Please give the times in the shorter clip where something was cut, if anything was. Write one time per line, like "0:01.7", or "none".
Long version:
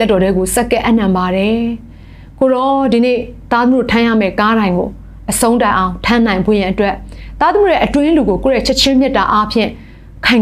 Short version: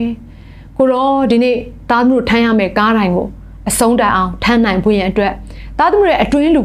none